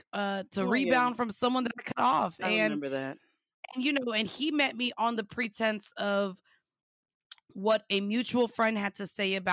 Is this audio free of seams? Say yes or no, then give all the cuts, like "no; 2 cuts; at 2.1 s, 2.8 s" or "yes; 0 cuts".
yes; 0 cuts